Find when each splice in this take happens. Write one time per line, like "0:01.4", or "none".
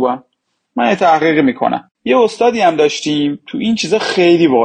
0:01.9